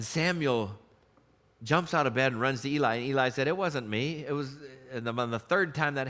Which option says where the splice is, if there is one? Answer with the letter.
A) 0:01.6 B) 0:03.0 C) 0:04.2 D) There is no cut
D